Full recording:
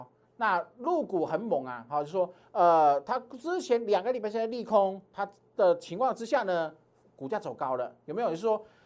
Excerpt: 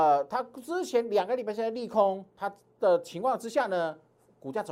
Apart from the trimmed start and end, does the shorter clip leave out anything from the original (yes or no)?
no